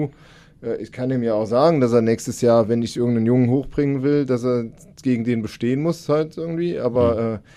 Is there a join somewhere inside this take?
no; 0 cuts

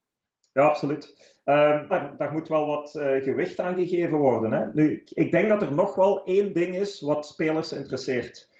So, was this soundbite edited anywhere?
yes; 1 cut; at 1.9 s

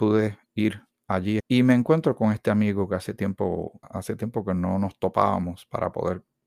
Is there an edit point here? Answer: yes; 2 cuts; at 1.4 s, 3.8 s

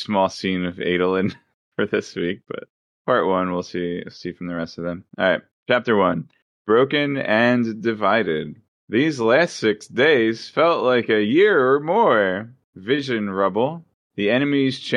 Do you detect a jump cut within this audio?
no; 0 cuts

